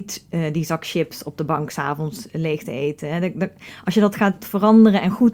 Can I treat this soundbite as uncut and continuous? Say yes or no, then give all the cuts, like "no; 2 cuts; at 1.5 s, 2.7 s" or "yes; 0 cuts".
yes; 0 cuts